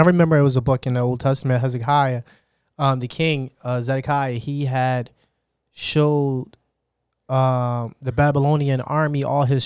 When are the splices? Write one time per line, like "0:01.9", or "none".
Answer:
none